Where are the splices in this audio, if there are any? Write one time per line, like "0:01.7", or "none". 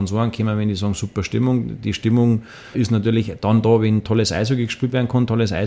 0:02.7